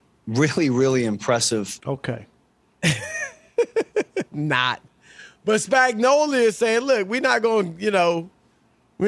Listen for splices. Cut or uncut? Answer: cut